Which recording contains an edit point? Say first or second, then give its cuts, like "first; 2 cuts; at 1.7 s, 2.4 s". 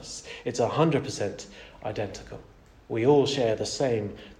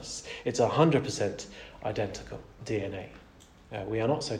second; 1 cut; at 2.6 s